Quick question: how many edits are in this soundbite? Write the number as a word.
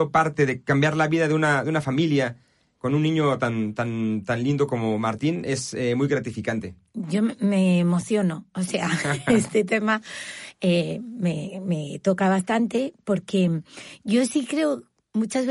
zero